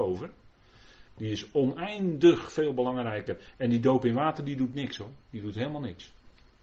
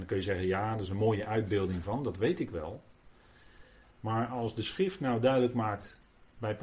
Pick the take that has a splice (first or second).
first